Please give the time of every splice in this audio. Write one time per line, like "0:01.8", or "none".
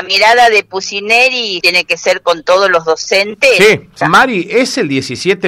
0:01.6
0:04.0